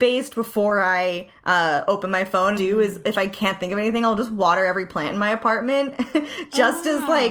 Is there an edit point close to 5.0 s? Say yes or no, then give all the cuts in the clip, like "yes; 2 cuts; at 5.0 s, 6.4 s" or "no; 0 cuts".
no; 1 cut; at 2.6 s